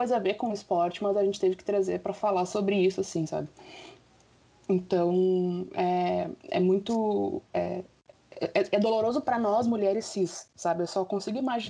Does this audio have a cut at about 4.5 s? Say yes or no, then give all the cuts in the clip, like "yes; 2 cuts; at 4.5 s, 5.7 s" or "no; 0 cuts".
no; 0 cuts